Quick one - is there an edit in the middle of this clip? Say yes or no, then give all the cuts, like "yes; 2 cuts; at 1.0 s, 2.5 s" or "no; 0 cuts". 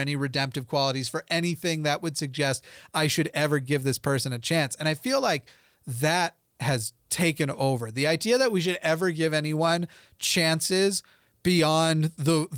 no; 0 cuts